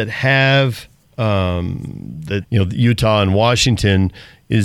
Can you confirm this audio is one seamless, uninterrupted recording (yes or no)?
no